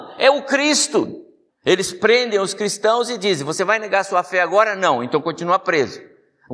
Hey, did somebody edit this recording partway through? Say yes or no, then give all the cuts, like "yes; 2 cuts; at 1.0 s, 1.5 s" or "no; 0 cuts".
yes; 1 cut; at 1.5 s